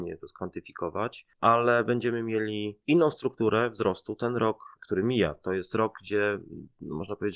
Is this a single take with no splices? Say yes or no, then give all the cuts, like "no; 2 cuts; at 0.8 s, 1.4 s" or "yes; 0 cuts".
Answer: yes; 0 cuts